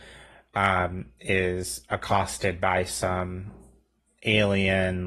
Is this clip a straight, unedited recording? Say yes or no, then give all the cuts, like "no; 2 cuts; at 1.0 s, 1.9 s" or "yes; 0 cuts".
yes; 0 cuts